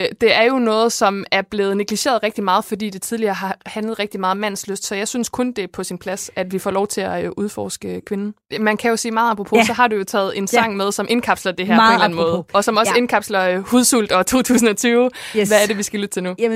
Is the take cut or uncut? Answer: uncut